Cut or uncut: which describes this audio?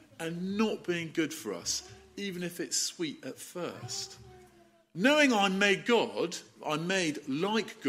uncut